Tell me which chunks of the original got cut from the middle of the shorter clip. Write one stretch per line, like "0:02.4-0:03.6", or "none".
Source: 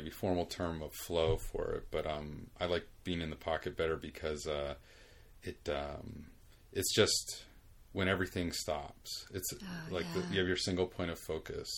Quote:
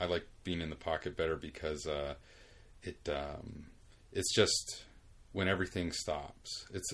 none